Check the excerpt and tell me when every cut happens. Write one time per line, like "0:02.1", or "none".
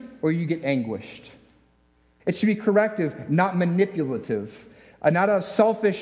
0:02.2